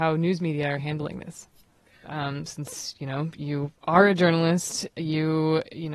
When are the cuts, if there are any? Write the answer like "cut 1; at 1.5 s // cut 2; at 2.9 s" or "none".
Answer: cut 1; at 2.0 s